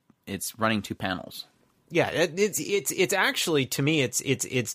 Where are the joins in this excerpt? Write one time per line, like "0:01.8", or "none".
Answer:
0:02.5